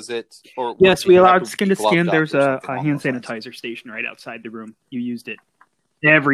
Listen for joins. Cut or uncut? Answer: uncut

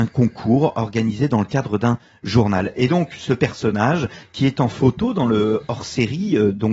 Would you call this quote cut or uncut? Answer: uncut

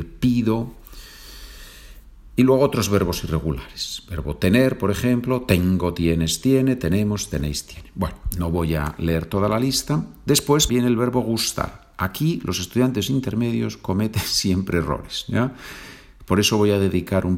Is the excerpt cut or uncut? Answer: cut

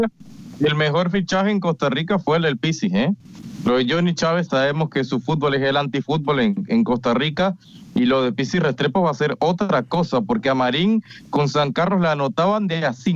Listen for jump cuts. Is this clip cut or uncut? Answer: uncut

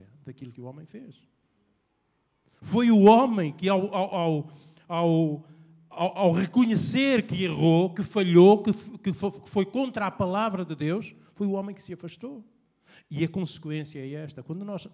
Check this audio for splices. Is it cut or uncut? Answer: uncut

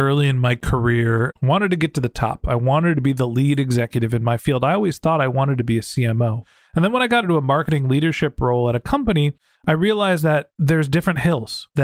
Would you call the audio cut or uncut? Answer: cut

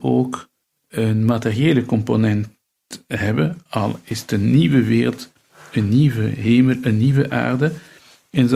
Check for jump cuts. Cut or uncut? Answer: uncut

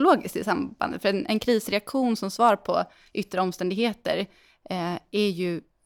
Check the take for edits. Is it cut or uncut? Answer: uncut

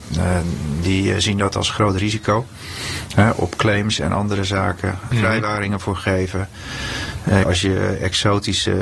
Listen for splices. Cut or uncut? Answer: cut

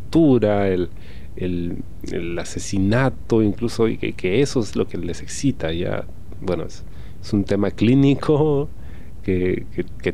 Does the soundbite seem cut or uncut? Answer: uncut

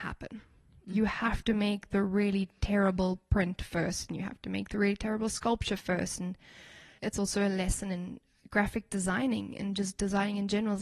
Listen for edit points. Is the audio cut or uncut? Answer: uncut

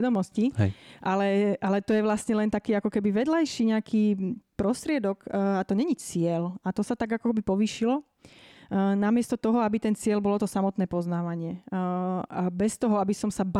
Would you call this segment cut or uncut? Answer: uncut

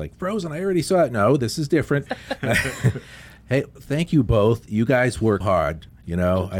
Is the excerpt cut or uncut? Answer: cut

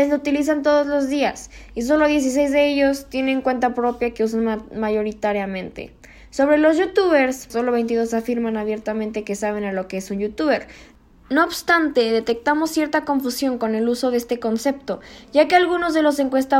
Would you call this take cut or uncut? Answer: cut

